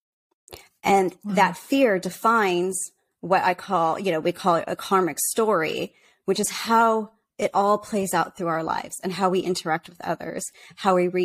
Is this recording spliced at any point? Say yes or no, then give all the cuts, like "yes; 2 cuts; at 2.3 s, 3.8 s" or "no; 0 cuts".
yes; 1 cut; at 4.2 s